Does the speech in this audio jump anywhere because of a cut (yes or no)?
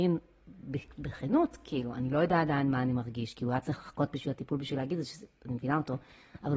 no